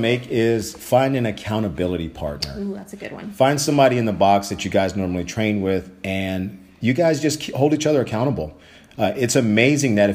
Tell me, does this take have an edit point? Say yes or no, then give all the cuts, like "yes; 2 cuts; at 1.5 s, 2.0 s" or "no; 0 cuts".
no; 0 cuts